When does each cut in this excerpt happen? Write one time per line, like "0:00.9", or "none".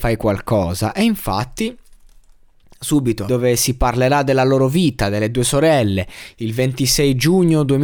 0:03.3
0:06.3